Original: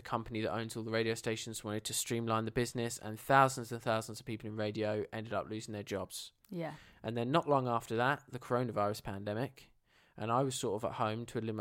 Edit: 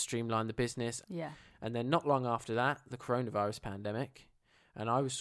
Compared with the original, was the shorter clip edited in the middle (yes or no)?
yes